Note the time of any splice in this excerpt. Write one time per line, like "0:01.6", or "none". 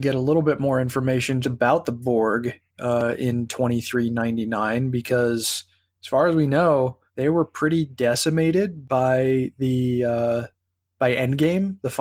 0:01.4
0:07.1